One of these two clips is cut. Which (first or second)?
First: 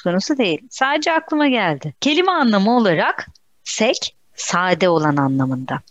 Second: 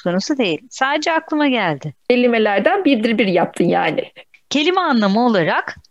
first